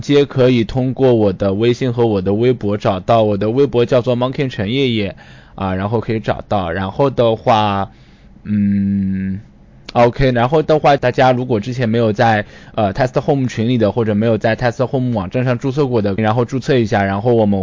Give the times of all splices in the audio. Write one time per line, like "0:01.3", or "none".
0:11.0
0:16.2